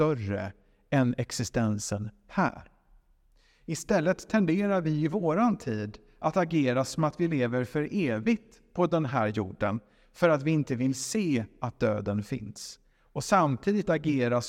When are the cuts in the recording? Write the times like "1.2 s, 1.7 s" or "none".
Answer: none